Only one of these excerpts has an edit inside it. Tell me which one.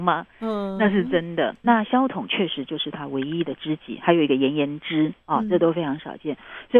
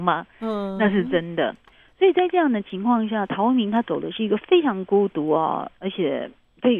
first; 1 cut; at 1.6 s

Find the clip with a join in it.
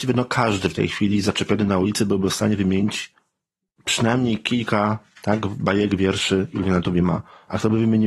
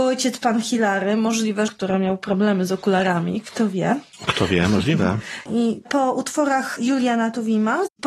second; 2 cuts; at 1.7 s, 5.5 s

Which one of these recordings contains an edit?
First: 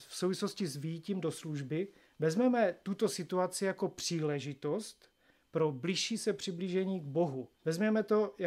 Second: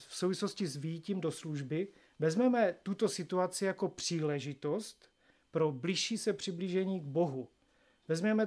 first; 1 cut; at 7.5 s

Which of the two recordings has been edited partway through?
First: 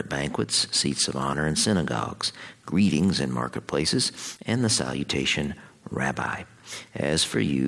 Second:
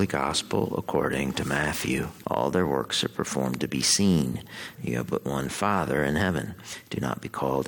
second; 2 cuts; at 2.2 s, 4.8 s

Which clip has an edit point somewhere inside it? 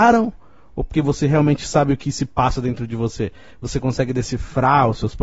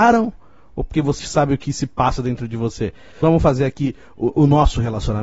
second; 2 cuts; at 1.2 s, 3.1 s

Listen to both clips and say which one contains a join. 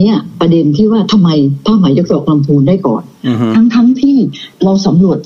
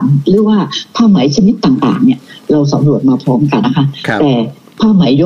second; 1 cut; at 3.6 s

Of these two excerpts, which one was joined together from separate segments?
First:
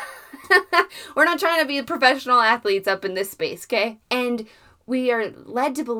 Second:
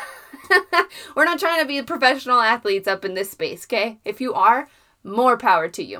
first; 1 cut; at 4.0 s

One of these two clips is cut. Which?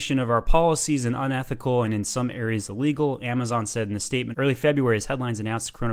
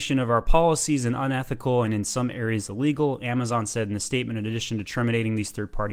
first; 1 cut; at 4.3 s

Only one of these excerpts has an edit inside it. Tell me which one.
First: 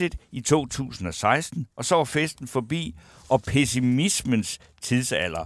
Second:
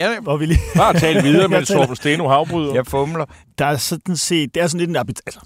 second; 1 cut; at 3.4 s

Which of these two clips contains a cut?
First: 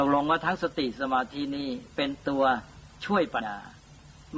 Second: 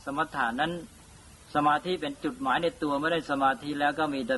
first; 1 cut; at 3.4 s

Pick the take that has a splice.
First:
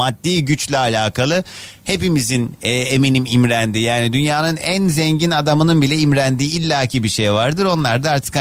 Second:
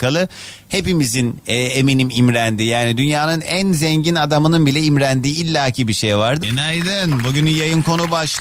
second; 1 cut; at 6.4 s

